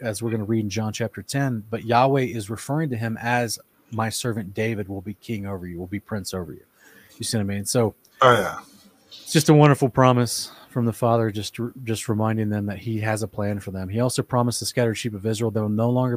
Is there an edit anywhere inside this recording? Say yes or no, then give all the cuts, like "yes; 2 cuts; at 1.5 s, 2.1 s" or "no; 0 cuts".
no; 0 cuts